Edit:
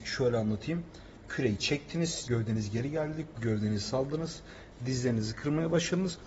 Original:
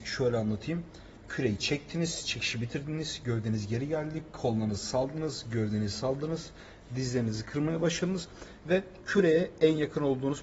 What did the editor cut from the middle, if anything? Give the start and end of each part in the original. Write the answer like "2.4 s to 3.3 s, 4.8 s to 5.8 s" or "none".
2.2 s to 3.2 s, 4.3 s to 5.4 s